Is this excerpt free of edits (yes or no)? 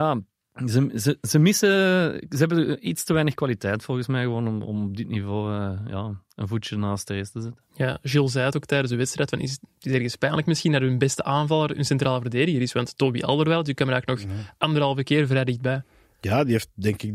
yes